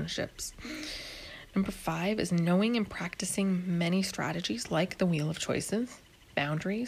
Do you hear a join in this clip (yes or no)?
no